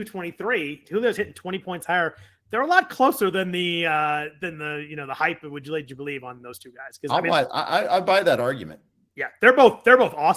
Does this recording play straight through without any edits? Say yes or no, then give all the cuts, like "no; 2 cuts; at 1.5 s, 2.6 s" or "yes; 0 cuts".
yes; 0 cuts